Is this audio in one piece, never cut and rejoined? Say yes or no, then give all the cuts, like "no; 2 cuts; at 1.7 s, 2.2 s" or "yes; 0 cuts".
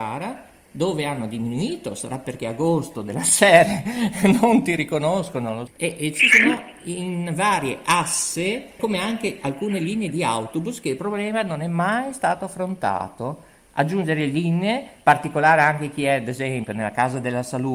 no; 2 cuts; at 5.7 s, 8.8 s